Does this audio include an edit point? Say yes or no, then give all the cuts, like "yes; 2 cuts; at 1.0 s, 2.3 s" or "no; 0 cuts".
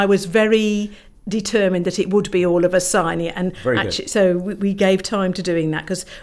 no; 0 cuts